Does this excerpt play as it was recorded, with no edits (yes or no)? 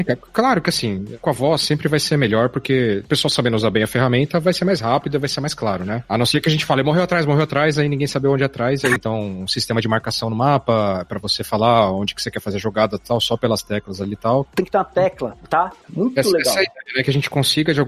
no